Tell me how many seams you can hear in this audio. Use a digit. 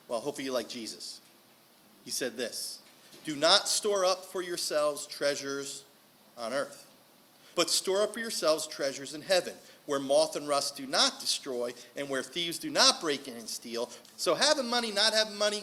2